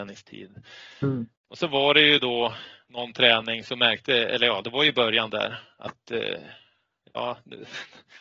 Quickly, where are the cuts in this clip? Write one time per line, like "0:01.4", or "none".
0:01.4